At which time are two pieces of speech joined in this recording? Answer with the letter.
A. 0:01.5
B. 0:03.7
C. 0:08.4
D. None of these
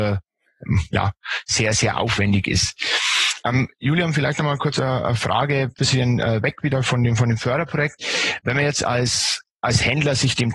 B